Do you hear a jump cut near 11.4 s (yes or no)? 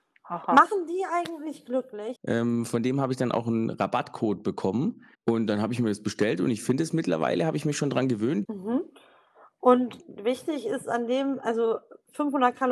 no